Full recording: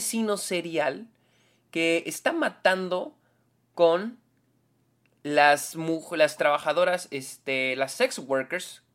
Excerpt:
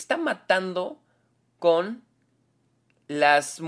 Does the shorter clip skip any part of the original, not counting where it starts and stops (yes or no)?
no